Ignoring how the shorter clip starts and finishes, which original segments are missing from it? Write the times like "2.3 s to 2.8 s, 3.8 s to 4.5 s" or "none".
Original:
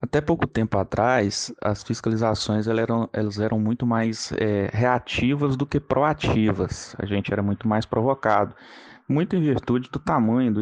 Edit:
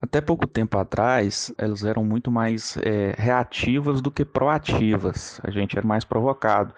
1.6 s to 3.1 s, 7.4 s to 7.6 s